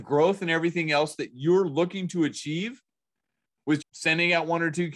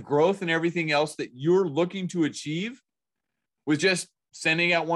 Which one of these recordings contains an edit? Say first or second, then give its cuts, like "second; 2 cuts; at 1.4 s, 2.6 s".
first; 1 cut; at 3.8 s